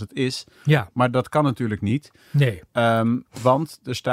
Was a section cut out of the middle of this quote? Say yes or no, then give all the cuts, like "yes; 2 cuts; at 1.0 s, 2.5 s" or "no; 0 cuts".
no; 0 cuts